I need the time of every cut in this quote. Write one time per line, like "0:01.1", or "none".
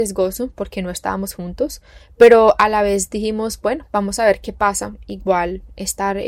none